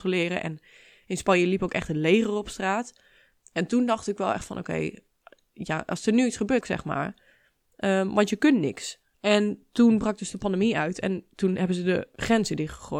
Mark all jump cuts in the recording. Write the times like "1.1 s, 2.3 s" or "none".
6.6 s, 9.1 s